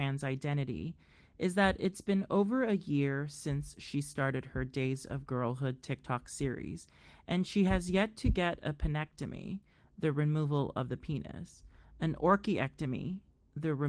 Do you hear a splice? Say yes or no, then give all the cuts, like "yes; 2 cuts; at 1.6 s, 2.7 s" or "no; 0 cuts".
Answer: no; 0 cuts